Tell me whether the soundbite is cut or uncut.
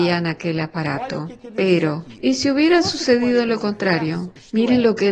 uncut